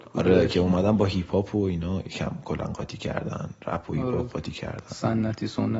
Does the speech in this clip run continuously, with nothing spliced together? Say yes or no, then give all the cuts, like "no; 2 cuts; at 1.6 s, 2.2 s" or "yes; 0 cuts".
yes; 0 cuts